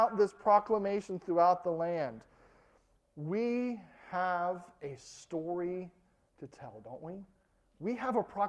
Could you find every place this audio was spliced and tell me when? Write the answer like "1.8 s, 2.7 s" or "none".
2.9 s